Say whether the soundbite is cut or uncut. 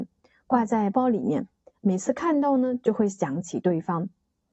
cut